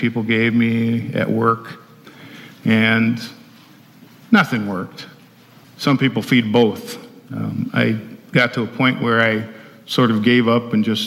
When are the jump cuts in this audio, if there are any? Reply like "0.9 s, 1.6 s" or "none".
5.6 s